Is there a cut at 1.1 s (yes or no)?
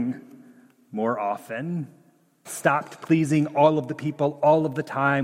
no